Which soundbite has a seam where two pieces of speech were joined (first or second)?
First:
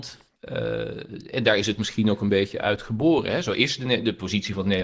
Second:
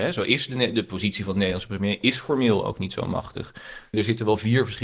second